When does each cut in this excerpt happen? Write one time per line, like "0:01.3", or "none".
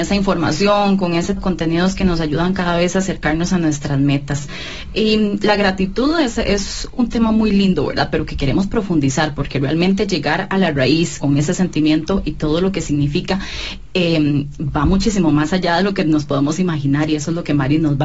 0:01.4
0:11.2